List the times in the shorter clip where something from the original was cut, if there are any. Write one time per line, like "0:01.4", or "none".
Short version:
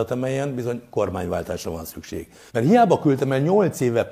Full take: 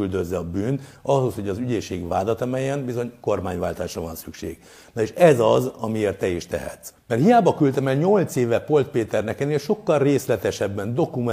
0:02.5